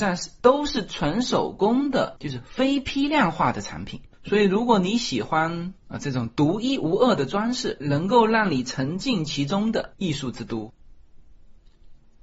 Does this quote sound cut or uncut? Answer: cut